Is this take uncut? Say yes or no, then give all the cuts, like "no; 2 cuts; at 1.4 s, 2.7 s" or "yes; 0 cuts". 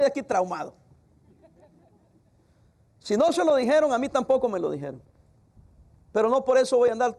yes; 0 cuts